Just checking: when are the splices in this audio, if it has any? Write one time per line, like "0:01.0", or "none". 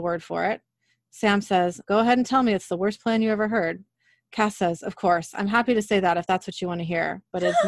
0:01.8